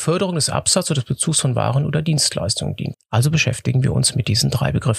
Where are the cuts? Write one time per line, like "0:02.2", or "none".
0:02.9